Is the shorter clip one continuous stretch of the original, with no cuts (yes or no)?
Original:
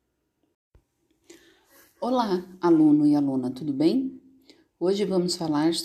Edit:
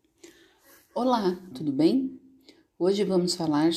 no